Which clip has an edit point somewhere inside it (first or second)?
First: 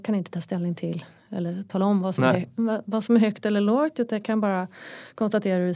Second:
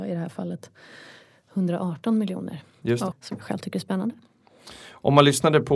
second